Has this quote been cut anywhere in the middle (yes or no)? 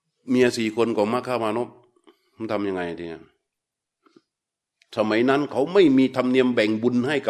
no